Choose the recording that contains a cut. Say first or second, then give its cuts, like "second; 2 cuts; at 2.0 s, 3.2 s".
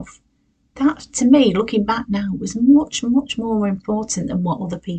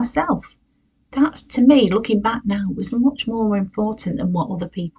second; 1 cut; at 2.9 s